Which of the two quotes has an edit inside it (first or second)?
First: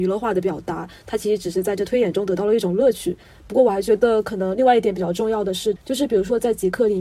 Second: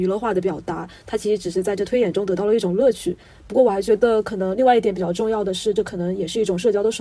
first